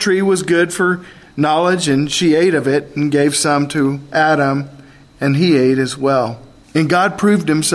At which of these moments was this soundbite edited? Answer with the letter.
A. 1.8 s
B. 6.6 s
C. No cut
B